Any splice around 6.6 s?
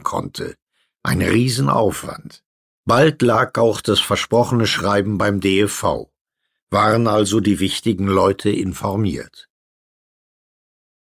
no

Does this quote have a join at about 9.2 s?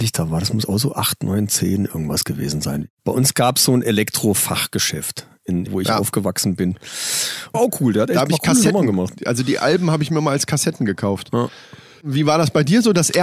no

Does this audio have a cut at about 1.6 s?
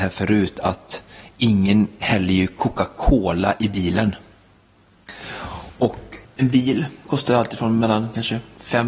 no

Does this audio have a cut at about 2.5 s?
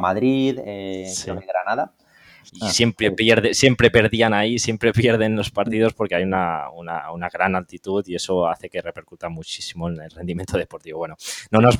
yes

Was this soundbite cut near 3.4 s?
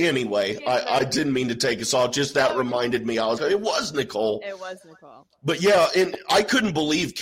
yes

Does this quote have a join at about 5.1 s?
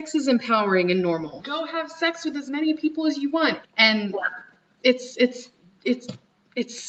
no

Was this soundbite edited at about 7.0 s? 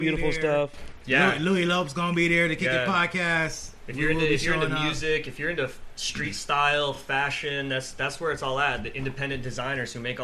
no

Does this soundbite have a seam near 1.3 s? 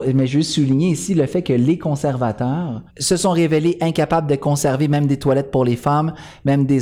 no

